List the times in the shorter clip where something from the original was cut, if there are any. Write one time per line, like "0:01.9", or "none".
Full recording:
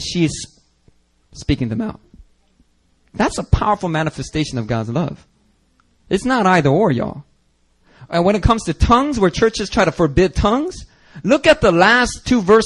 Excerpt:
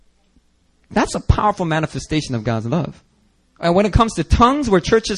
0:03.6